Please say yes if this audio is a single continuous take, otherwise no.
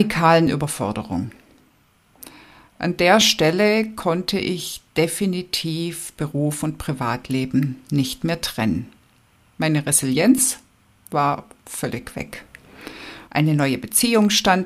no